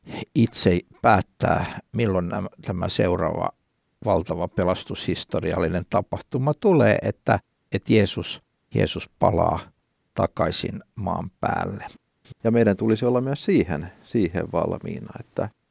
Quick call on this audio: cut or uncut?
cut